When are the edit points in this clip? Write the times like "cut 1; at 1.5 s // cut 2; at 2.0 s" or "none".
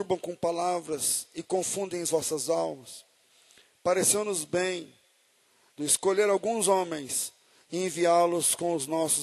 cut 1; at 5.8 s